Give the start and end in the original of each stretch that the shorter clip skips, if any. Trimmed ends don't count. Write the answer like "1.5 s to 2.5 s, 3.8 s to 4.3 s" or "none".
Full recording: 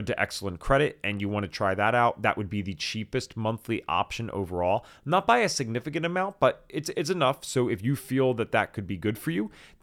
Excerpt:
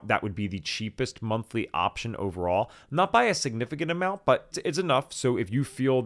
6.7 s to 6.8 s

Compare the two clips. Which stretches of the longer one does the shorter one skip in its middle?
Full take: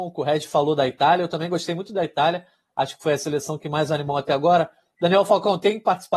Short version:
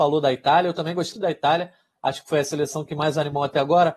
1.7 s to 1.9 s

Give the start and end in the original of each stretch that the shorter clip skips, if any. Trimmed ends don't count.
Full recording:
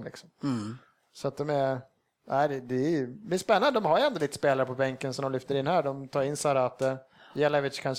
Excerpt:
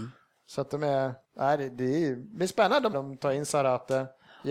1.9 s to 2.1 s, 3.8 s to 5.8 s

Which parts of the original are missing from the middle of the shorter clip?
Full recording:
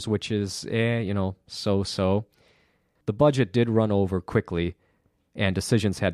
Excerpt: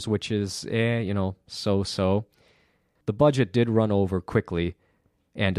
none

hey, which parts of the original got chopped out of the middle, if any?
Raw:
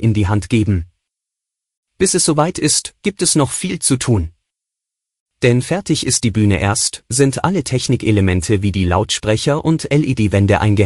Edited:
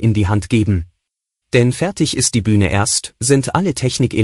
1.4 s to 5.3 s

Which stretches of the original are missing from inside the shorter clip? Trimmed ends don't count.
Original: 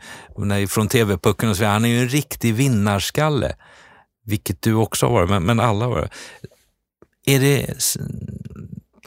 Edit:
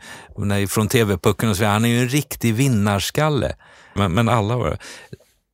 4.0 s to 5.3 s

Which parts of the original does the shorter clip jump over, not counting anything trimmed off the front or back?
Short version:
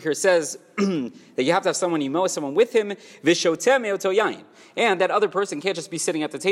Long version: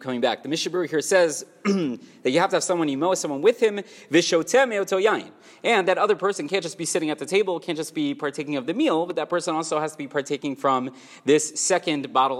none

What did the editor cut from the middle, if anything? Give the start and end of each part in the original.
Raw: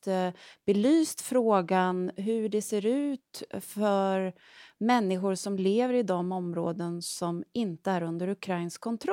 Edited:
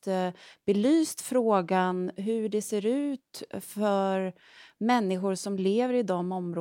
none

